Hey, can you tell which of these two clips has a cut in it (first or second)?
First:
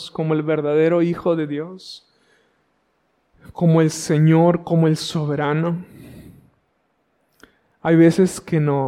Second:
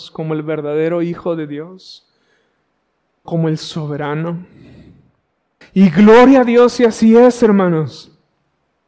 second